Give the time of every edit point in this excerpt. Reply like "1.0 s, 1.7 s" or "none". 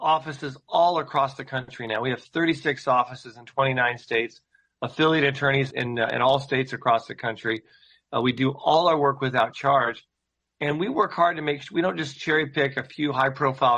5.7 s